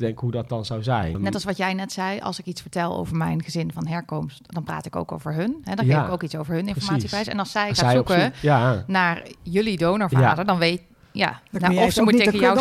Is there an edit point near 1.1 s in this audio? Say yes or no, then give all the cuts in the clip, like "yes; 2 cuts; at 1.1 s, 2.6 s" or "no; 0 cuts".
yes; 1 cut; at 1.1 s